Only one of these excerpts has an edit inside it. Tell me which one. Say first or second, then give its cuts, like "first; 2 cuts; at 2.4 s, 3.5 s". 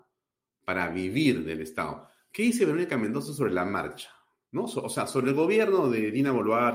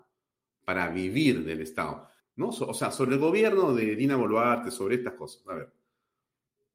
second; 1 cut; at 2.2 s